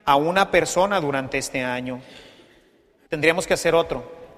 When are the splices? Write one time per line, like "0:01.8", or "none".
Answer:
0:03.0